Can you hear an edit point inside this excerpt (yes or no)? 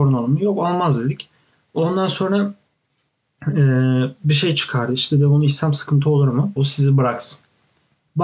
yes